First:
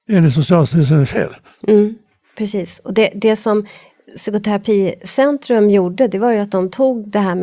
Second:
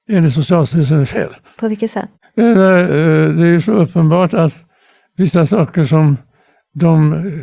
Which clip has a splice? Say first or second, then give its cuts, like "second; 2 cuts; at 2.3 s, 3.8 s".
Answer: second; 1 cut; at 1.5 s